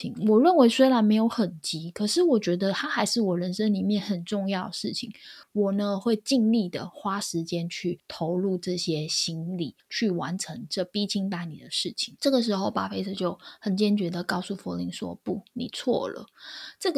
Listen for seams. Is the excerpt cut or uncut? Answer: uncut